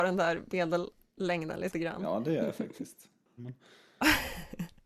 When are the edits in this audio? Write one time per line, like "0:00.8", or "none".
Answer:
0:03.4

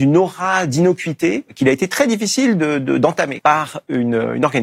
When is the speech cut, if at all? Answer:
0:03.4

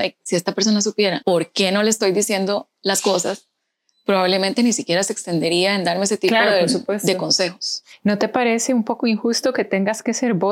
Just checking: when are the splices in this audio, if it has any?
none

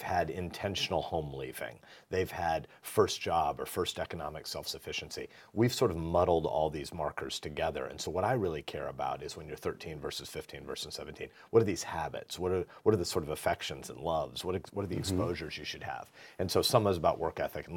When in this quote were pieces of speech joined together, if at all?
none

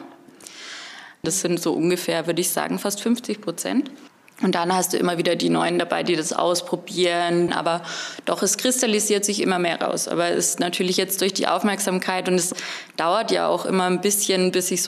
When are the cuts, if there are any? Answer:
0:01.2
0:07.5

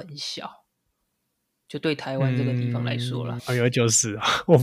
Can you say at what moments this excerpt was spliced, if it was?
0:03.4

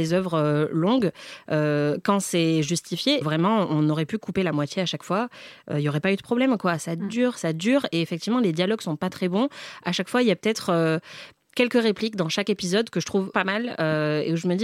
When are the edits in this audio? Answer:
0:03.2
0:13.3

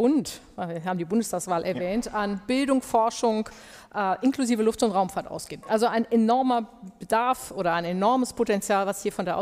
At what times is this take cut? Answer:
none

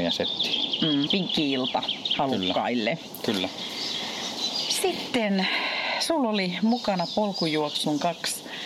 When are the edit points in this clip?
0:01.1

